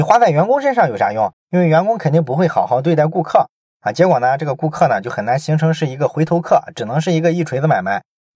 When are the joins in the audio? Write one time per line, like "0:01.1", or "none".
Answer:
0:01.3